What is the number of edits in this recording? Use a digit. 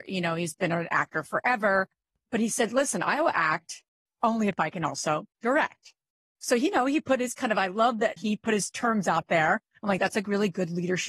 1